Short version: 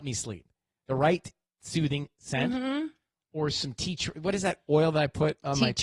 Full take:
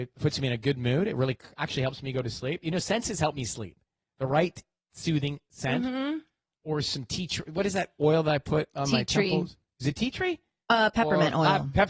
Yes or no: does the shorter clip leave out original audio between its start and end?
no